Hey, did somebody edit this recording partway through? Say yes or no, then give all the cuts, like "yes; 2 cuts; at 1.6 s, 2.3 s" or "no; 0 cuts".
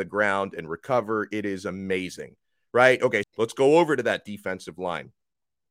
yes; 1 cut; at 3.2 s